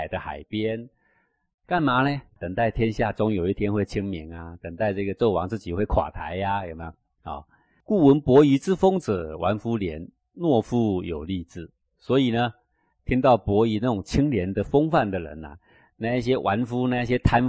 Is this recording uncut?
yes; 0 cuts

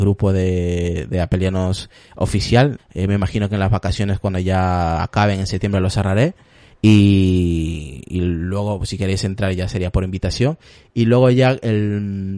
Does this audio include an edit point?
yes; 1 cut; at 2.8 s

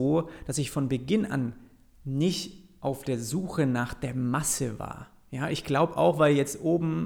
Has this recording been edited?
no; 0 cuts

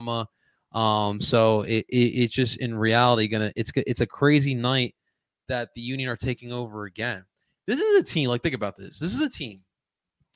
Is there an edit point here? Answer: no; 0 cuts

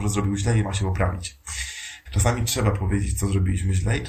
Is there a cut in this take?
yes; 1 cut; at 2.1 s

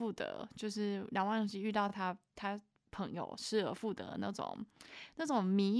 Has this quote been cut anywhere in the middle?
no; 0 cuts

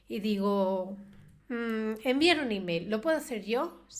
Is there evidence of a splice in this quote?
no; 0 cuts

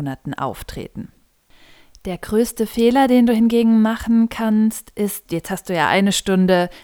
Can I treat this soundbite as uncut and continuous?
no; 1 cut; at 5.3 s

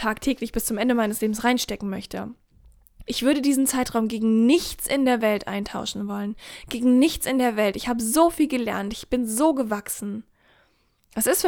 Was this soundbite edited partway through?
yes; 1 cut; at 3.1 s

